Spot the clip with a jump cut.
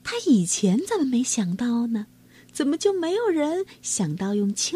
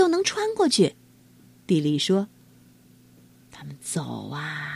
second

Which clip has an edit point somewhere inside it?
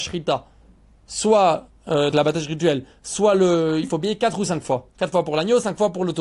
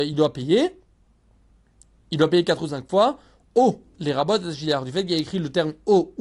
first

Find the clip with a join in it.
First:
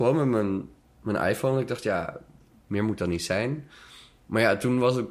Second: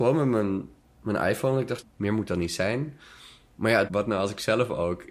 second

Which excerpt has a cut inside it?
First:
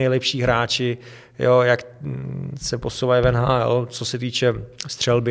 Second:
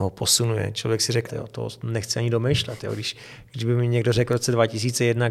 second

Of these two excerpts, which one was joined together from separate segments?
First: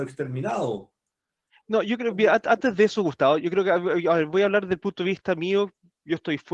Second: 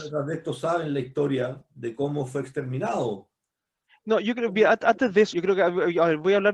second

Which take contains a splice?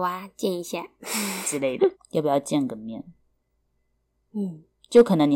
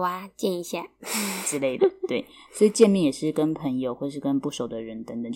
first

